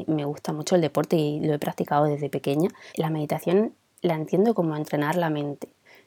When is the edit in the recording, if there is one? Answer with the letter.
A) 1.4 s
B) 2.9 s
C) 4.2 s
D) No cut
B